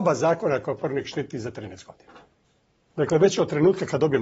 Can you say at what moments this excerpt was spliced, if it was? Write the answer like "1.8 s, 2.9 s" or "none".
2.9 s